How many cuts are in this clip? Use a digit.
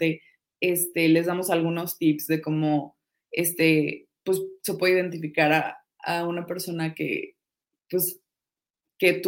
0